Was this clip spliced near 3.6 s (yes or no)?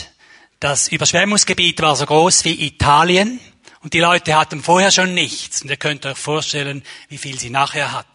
no